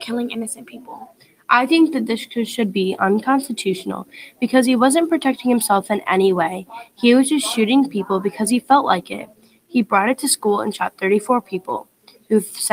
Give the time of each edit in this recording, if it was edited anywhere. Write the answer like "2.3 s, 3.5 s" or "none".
none